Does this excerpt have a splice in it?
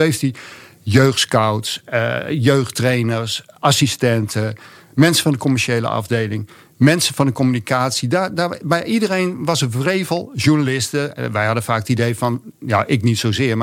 no; 0 cuts

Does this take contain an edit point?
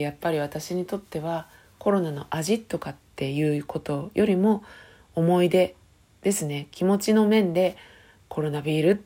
no; 0 cuts

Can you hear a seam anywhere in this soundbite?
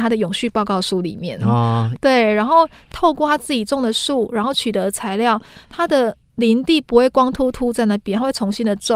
yes; 1 cut; at 1.9 s

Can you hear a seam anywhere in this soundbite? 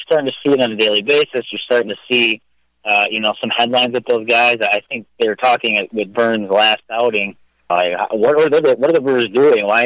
yes; 1 cut; at 7.7 s

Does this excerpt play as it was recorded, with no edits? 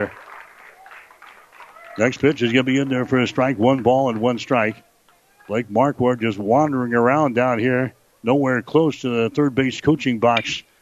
yes; 0 cuts

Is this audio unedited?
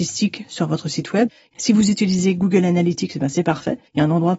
yes; 0 cuts

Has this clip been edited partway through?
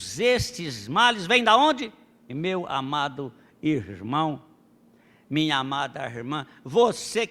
yes; 1 cut; at 2.3 s

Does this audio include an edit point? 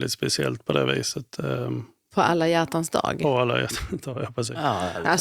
no; 0 cuts

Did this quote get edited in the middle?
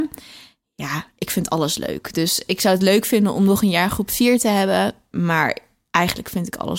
no; 0 cuts

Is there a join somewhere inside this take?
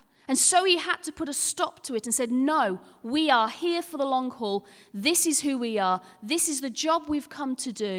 no; 0 cuts

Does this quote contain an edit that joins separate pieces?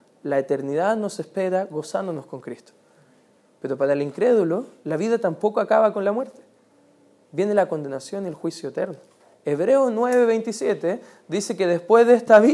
no; 0 cuts

